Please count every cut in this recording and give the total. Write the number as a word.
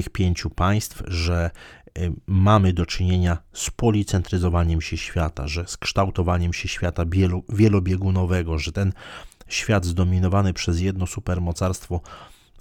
zero